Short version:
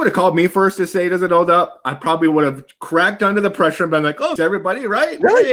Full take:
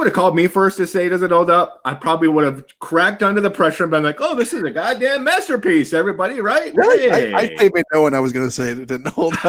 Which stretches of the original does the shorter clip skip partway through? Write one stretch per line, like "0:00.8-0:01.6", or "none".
0:04.4-0:05.9